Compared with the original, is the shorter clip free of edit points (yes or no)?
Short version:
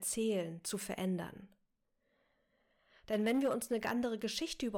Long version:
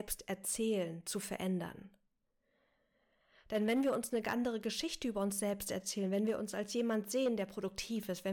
yes